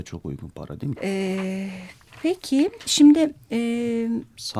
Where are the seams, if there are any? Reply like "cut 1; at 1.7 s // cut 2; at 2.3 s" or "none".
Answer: cut 1; at 1.0 s